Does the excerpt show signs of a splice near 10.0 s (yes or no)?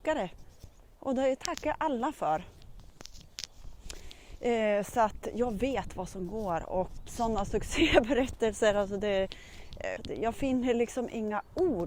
yes